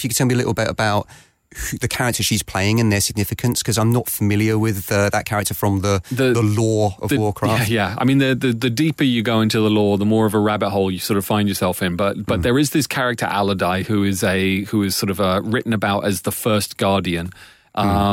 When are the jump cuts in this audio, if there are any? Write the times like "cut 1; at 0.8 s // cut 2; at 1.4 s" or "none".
none